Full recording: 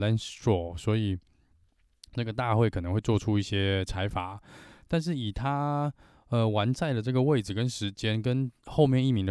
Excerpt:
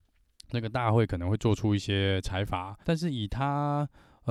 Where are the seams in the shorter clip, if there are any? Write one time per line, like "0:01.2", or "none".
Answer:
0:02.8